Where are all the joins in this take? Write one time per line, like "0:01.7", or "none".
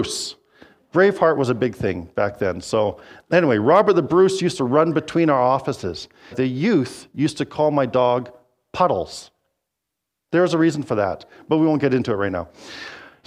0:06.3